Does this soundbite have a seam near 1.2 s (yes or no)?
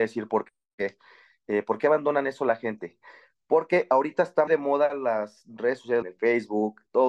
no